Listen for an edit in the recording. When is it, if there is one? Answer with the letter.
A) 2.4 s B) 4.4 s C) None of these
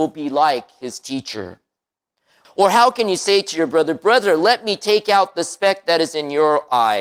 A